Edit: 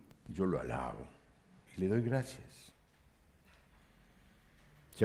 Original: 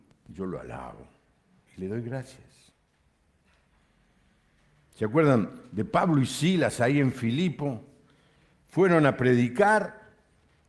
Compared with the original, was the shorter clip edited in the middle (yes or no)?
no